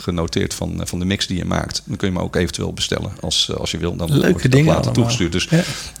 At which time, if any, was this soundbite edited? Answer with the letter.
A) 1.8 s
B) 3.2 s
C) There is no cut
C